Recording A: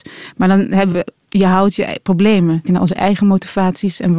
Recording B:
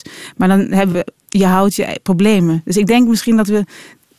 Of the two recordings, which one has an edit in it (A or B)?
A